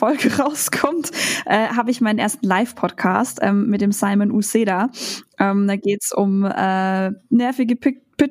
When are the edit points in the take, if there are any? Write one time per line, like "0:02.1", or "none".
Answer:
none